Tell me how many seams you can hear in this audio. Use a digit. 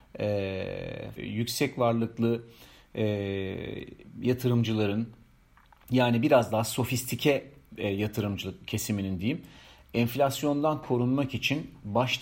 1